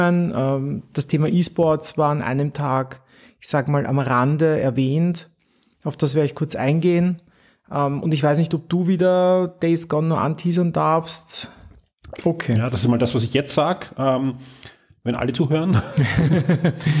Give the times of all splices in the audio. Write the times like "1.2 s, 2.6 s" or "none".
12.2 s